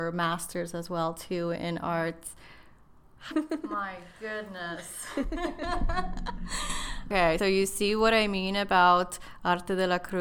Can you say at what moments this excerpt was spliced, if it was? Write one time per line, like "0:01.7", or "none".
0:03.3
0:07.4